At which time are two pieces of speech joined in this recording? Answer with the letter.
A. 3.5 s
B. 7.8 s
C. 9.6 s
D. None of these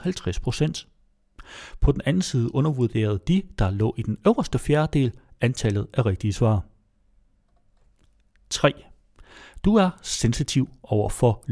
D